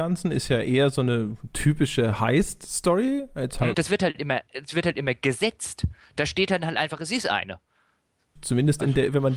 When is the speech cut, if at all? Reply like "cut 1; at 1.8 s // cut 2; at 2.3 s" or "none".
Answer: cut 1; at 3.7 s // cut 2; at 8.4 s